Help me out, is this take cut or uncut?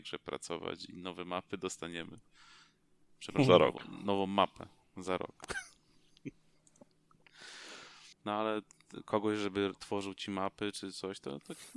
cut